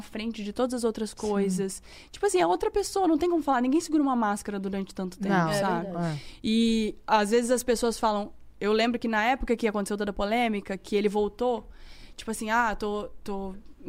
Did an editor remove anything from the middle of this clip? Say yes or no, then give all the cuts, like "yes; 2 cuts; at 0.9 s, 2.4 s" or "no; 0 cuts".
no; 0 cuts